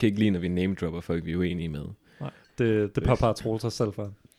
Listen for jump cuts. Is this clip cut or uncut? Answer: cut